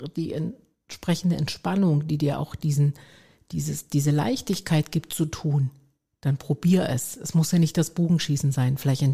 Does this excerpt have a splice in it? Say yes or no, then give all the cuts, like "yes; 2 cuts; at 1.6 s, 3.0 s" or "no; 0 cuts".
no; 0 cuts